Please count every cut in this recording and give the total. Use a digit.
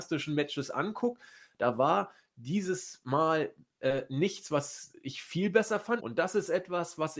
1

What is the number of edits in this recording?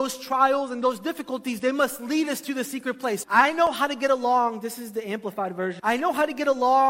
2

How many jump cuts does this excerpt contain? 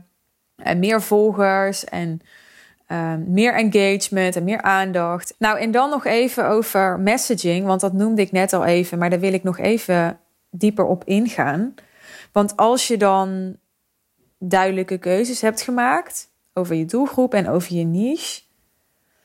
1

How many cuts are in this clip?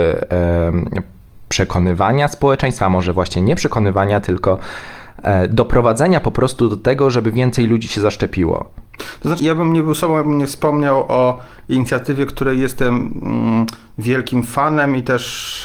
1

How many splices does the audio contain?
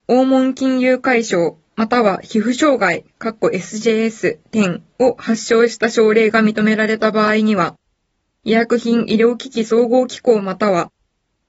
0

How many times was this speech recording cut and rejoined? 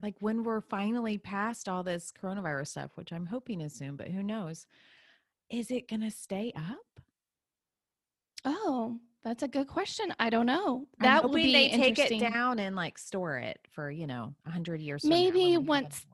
0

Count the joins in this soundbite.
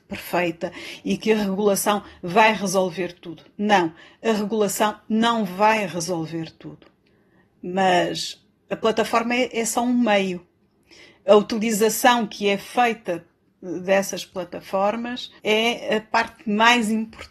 1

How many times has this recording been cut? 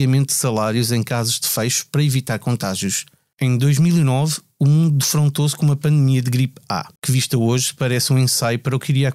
2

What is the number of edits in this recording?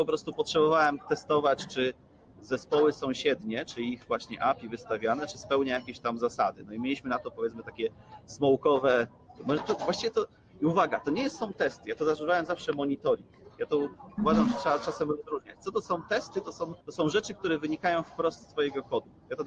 1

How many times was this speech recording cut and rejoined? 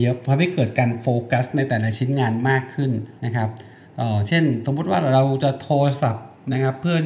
1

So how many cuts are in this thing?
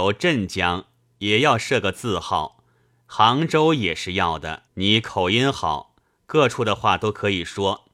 1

